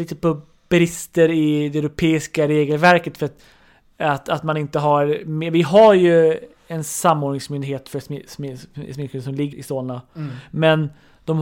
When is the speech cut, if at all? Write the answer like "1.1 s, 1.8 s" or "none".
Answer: 9.5 s